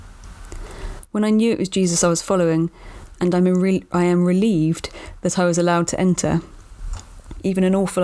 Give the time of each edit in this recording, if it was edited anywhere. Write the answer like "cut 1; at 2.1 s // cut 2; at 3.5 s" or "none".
cut 1; at 3.2 s